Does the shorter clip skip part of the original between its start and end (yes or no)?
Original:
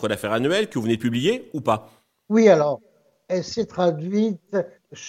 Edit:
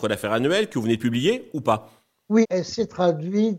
yes